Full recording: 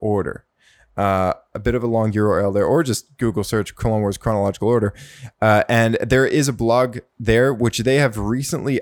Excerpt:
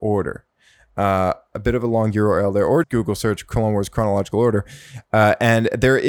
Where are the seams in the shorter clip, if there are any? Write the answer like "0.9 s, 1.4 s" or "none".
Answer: 2.8 s